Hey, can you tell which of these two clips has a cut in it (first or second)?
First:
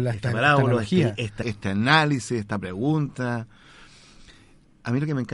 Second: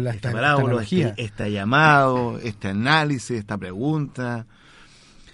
first